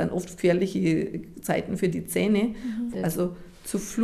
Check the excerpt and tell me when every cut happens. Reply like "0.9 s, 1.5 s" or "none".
2.9 s